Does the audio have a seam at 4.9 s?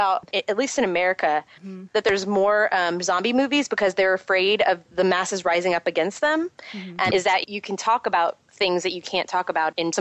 no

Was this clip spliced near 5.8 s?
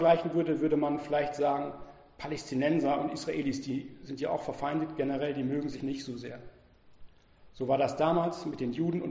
yes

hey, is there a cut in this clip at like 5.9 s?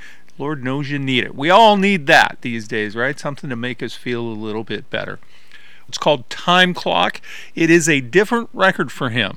yes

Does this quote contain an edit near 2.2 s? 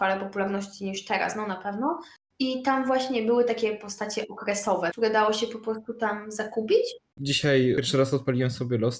no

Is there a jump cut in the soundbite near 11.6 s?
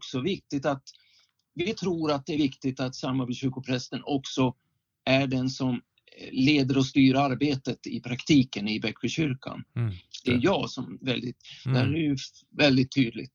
yes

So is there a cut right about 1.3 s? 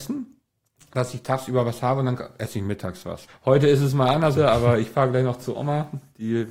no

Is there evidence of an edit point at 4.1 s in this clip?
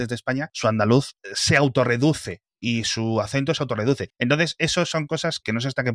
yes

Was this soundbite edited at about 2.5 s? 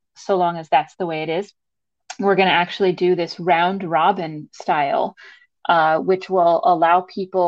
no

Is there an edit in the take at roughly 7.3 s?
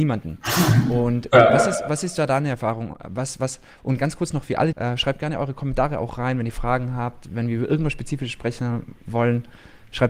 no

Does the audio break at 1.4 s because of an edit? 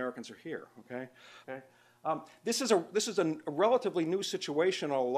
yes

